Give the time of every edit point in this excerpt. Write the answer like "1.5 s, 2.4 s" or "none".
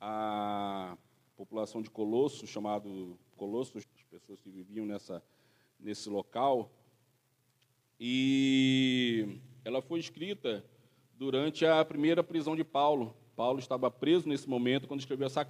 3.8 s